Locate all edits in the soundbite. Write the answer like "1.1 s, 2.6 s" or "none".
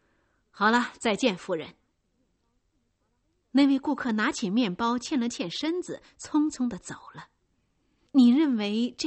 8.1 s